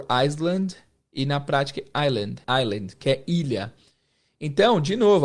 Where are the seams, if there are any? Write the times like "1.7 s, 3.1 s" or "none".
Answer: 2.4 s